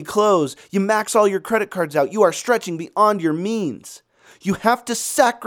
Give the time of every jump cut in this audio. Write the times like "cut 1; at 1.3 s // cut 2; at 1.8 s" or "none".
none

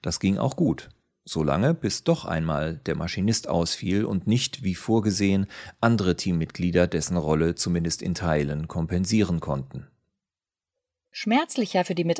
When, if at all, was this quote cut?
none

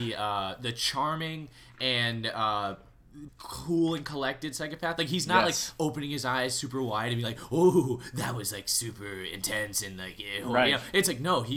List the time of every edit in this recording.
cut 1; at 3.3 s

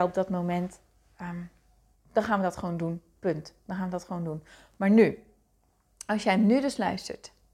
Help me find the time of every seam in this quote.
cut 1; at 1.9 s

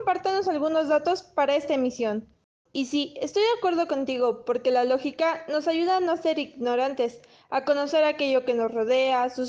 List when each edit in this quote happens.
cut 1; at 2.7 s

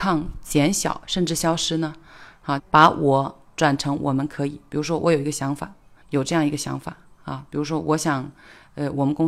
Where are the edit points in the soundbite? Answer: cut 1; at 2.6 s // cut 2; at 6.0 s

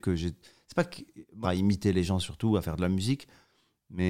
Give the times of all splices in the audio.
cut 1; at 1.4 s

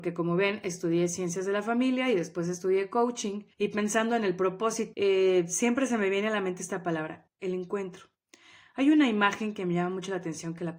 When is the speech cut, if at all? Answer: cut 1; at 3.5 s // cut 2; at 4.9 s // cut 3; at 7.3 s

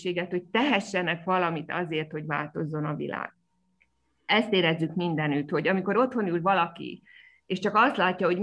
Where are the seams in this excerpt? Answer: none

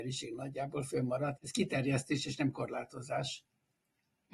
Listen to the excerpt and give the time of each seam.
cut 1; at 1.4 s

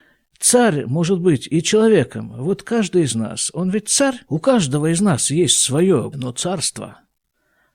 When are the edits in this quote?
cut 1; at 4.2 s // cut 2; at 6.1 s

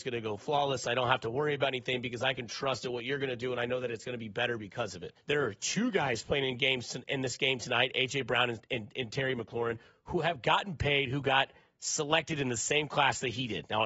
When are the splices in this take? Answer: cut 1; at 5.2 s

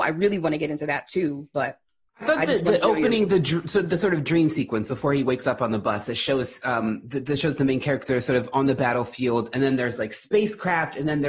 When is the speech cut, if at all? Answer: none

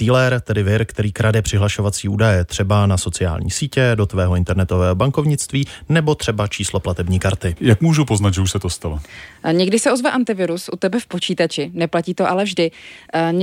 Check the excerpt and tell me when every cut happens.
cut 1; at 7.6 s

